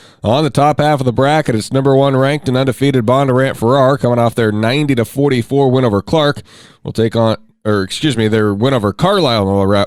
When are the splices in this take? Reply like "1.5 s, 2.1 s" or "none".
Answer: none